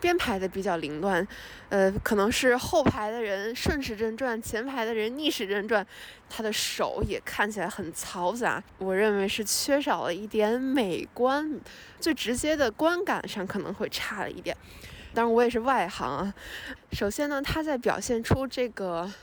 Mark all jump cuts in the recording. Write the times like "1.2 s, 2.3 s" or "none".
12.0 s, 15.1 s, 16.8 s